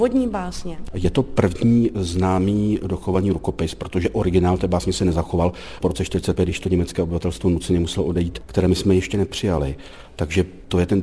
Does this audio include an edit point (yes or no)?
yes